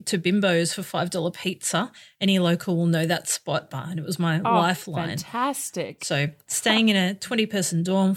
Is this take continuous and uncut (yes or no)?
no